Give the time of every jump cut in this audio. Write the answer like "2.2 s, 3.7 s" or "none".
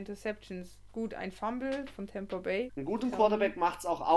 2.7 s